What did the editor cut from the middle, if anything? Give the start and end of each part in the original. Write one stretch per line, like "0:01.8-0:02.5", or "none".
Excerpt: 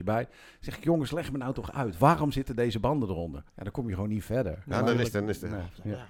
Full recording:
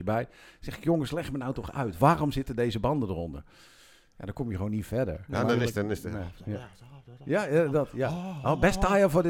0:03.5-0:04.1